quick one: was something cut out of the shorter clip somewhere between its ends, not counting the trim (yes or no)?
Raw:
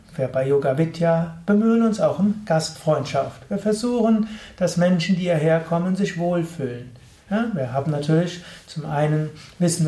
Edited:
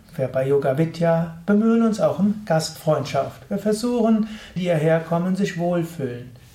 yes